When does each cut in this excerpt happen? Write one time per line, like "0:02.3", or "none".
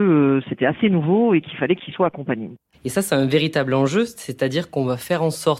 0:02.7